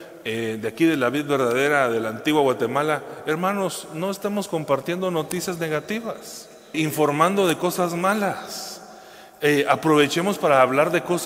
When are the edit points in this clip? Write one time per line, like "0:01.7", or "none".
0:06.7